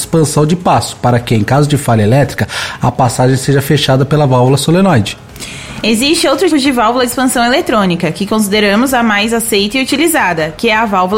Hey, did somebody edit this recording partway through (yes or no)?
yes